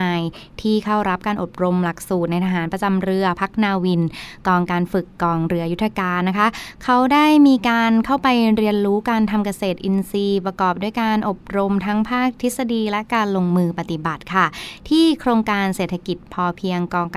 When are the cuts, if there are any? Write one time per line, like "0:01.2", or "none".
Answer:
none